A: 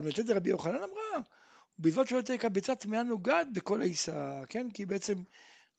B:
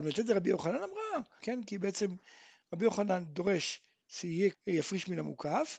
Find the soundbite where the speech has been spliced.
B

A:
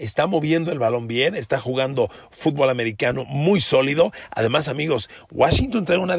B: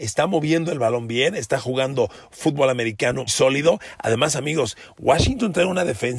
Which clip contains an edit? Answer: B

